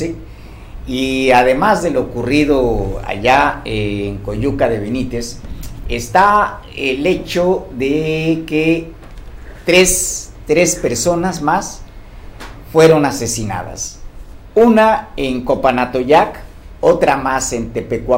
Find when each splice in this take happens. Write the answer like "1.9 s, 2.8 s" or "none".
none